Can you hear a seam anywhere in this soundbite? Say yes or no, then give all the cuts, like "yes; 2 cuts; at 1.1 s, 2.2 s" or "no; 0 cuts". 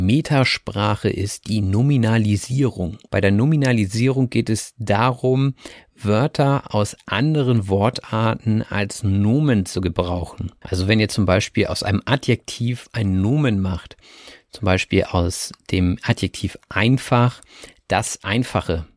no; 0 cuts